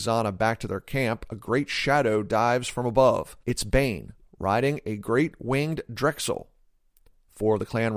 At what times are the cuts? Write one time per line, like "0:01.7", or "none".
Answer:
0:03.4

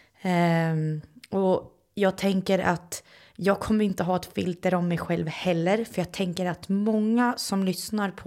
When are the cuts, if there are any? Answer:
none

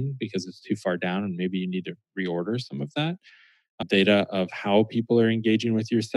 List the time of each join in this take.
0:03.8

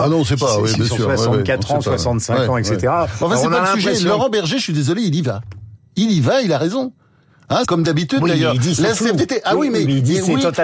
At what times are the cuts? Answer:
0:07.6

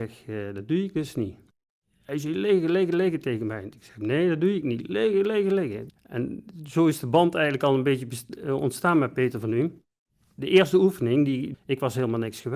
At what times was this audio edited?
0:05.9
0:11.5

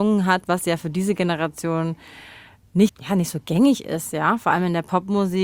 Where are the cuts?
0:02.9

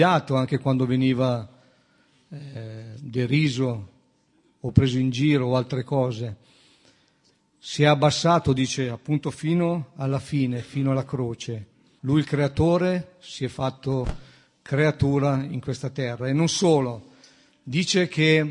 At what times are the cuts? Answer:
0:12.0

